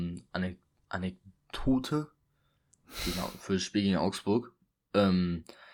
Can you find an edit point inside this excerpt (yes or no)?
no